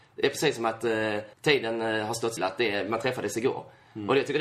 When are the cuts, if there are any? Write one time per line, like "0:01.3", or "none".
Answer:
0:01.3
0:02.4